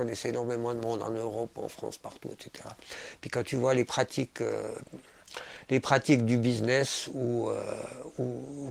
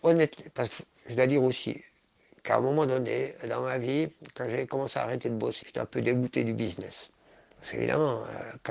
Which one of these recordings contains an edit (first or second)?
second